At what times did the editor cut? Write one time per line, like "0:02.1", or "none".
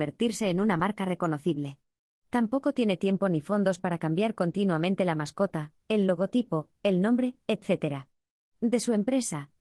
none